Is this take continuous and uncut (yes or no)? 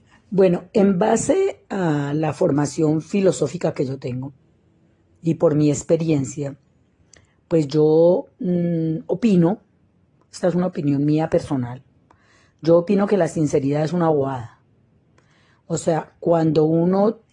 yes